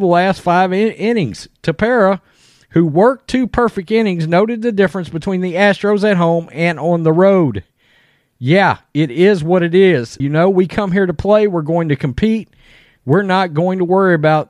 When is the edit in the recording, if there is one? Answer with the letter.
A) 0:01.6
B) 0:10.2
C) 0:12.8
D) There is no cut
B